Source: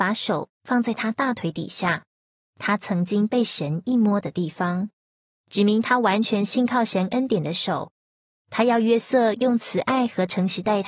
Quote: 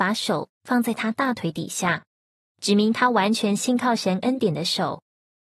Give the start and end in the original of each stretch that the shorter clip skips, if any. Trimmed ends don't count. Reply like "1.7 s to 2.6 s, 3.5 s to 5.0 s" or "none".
2.5 s to 5.4 s